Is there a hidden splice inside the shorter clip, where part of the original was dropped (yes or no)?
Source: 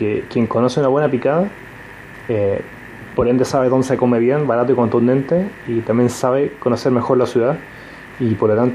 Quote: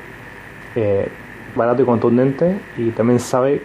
yes